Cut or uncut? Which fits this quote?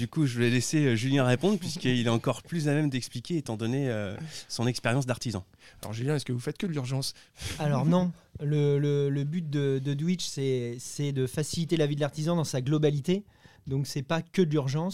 uncut